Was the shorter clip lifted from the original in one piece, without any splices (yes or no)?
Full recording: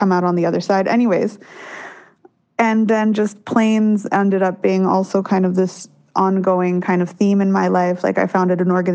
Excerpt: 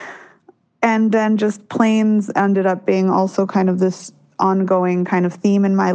yes